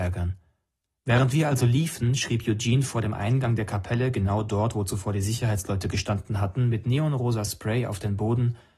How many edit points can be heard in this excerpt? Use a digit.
0